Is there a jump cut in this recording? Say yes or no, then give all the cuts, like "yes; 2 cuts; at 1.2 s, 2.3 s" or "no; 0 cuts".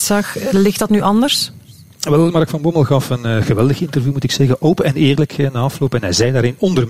no; 0 cuts